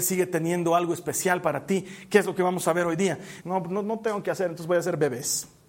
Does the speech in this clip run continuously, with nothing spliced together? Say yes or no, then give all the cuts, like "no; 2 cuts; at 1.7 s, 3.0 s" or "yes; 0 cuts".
no; 1 cut; at 3.4 s